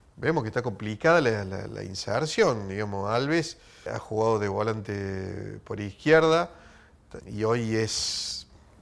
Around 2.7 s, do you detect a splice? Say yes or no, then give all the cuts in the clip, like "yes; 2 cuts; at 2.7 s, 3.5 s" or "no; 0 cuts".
no; 2 cuts; at 3.9 s, 7.2 s